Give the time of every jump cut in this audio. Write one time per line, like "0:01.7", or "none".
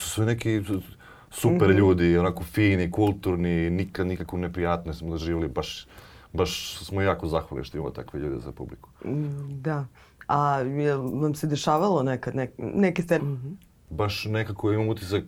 0:13.2